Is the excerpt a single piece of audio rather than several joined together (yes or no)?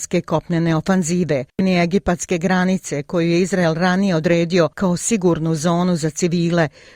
no